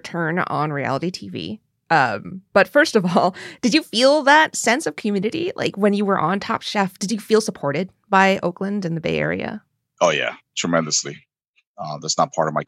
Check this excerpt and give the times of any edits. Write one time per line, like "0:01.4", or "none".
0:11.7

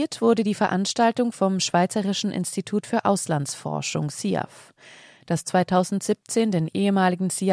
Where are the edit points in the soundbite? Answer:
none

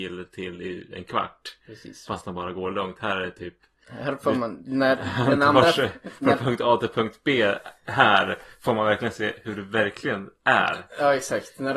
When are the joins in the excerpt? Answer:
none

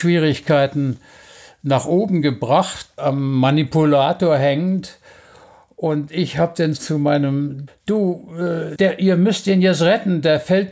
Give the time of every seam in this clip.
0:03.0
0:07.7
0:08.8

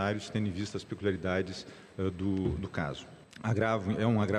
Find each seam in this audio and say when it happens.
0:03.2

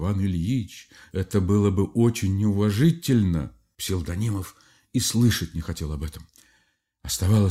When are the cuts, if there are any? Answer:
0:03.7

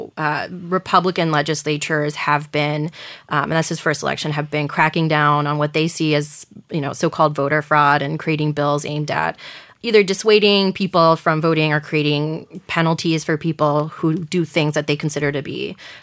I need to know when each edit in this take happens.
none

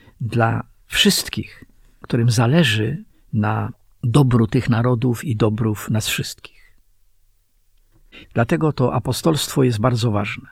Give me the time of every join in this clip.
0:08.2

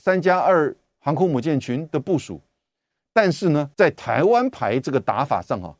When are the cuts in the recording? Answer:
0:03.7

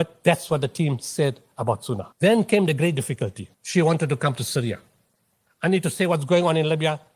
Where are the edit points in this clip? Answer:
0:02.1
0:03.5
0:05.5

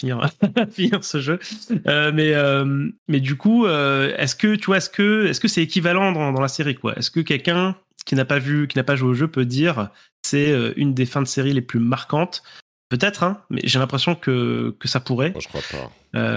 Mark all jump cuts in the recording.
none

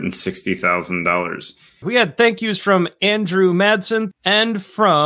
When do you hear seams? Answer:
0:01.8
0:04.1

